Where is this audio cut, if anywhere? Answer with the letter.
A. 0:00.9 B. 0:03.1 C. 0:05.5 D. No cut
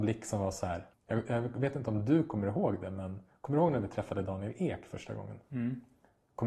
A